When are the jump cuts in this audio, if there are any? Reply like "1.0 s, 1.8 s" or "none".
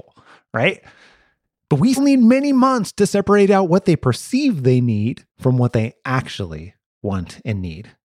2.0 s, 5.3 s